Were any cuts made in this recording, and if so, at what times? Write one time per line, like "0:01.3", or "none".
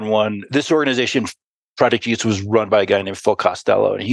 none